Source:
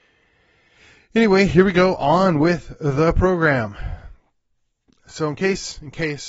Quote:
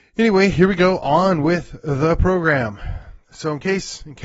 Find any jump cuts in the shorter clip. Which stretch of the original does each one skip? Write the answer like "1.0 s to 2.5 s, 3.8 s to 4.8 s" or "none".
4.2 s to 5.0 s

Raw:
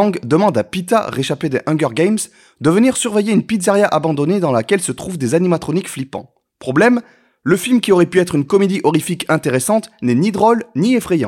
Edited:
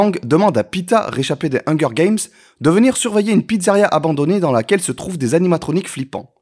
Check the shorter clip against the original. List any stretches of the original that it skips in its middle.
none

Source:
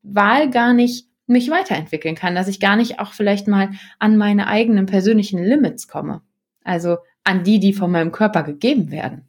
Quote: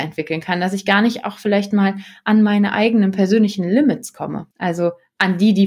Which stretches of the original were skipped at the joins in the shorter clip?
6.3 s to 6.6 s

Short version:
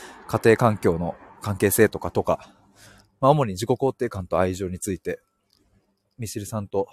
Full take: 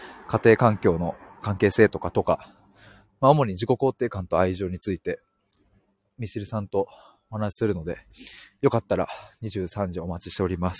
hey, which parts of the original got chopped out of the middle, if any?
none

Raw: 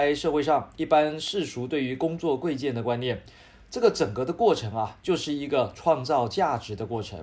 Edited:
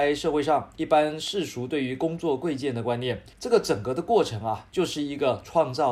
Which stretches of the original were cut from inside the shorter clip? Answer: 3.3 s to 3.6 s

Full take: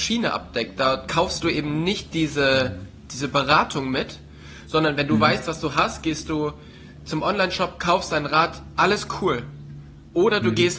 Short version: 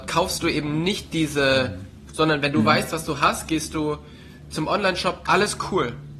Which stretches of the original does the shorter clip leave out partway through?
3.1 s to 4.6 s, 7.8 s to 8.7 s

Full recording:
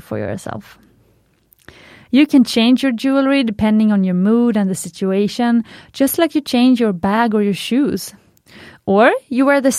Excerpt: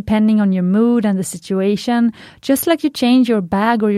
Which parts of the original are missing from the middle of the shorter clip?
none

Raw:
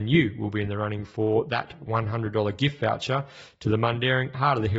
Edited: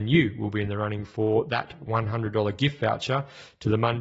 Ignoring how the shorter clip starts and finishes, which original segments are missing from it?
none

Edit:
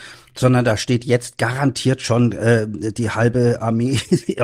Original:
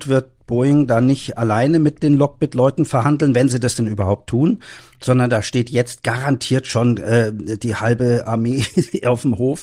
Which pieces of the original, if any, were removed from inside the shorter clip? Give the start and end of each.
none

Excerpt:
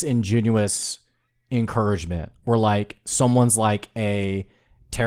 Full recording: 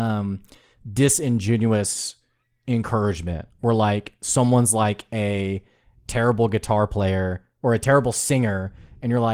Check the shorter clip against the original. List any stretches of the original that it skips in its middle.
none

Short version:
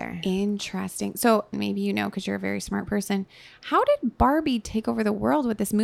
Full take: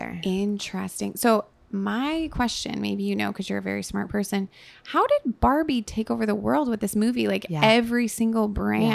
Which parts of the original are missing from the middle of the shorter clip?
1.5 s to 2.8 s

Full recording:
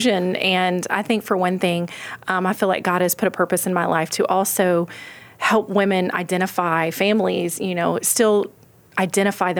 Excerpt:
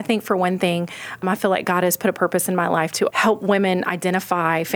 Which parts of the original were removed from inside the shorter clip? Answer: 2.2 s to 2.4 s, 4.3 s to 5.4 s

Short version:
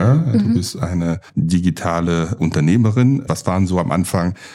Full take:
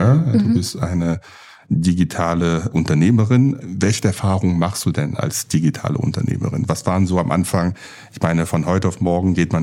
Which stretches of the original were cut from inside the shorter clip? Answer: 1.3 s to 1.6 s, 3.6 s to 6.7 s

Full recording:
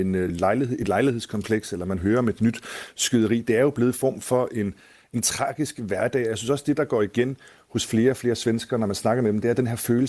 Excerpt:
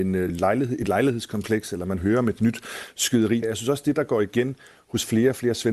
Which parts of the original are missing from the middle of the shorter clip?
3.4 s to 6.2 s

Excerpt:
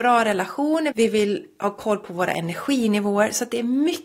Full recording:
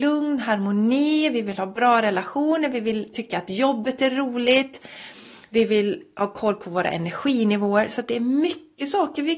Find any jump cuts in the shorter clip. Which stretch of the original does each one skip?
2.7 s to 5.5 s

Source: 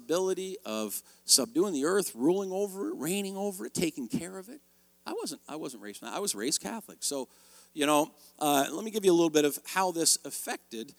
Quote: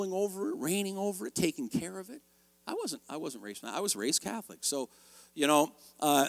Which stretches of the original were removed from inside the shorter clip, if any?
none

